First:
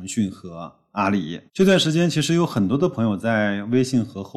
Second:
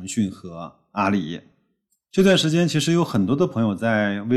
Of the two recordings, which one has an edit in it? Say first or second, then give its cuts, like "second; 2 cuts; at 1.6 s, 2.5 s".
first; 1 cut; at 1.5 s